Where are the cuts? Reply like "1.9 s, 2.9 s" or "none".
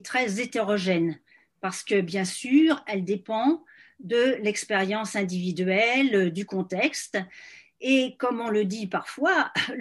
none